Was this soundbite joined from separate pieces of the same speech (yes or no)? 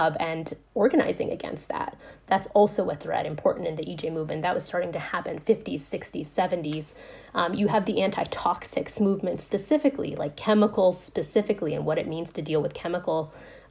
no